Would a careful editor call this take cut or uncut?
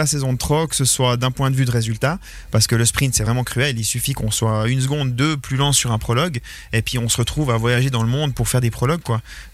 uncut